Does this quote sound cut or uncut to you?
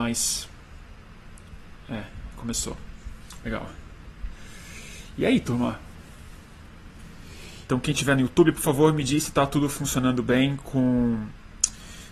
cut